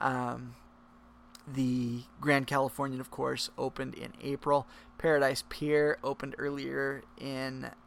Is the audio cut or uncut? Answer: uncut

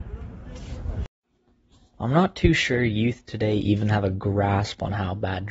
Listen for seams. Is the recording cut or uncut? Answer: uncut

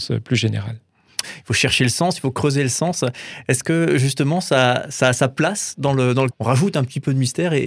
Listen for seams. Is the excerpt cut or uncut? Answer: cut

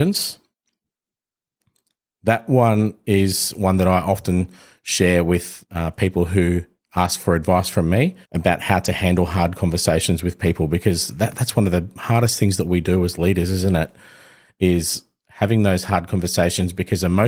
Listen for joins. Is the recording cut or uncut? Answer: cut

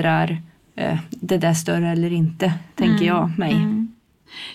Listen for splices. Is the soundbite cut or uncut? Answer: uncut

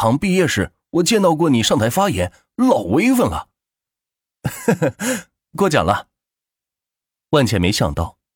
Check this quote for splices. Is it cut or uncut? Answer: uncut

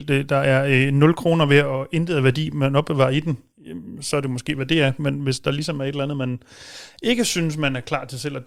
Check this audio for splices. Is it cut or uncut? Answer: uncut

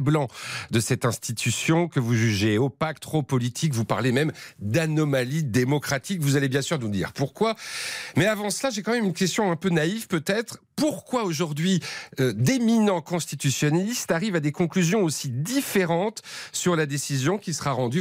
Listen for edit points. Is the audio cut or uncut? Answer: uncut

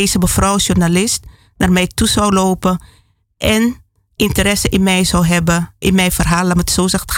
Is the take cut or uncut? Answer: uncut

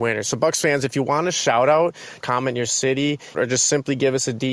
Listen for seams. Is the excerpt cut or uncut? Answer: cut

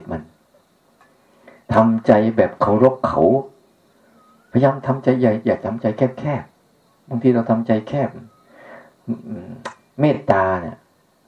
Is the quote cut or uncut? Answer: uncut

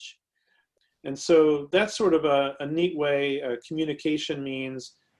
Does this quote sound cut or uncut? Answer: uncut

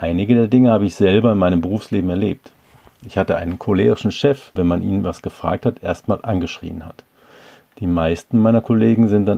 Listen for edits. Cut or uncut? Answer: cut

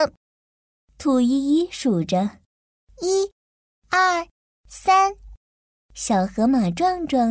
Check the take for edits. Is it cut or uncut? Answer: uncut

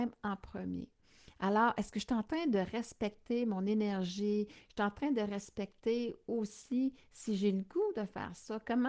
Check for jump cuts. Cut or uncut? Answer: uncut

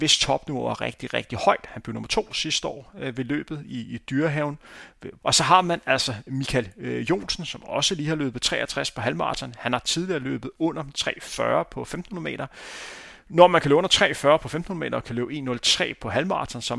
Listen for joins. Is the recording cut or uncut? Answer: cut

